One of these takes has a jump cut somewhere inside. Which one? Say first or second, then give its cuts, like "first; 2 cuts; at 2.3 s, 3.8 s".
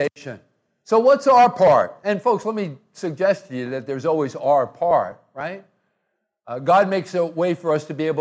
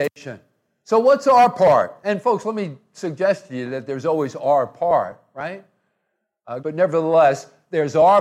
second; 1 cut; at 6.6 s